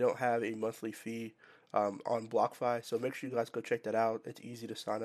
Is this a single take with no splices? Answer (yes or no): yes